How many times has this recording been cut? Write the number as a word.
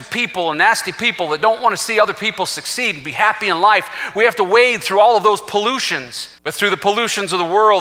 one